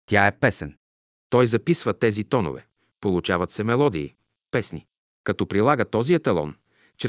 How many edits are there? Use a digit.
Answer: 1